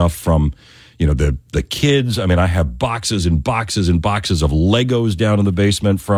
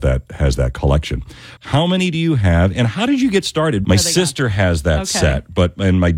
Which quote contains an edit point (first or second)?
second